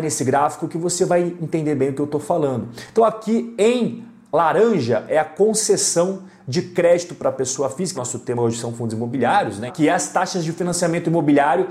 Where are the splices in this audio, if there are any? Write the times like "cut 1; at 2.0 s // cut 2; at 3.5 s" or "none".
cut 1; at 7.9 s // cut 2; at 9.7 s